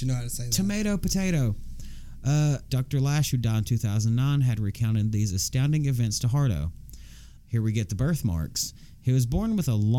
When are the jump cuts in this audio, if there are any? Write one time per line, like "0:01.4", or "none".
0:02.7
0:07.4